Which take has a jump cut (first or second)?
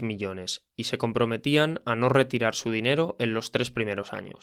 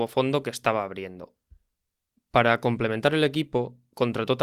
second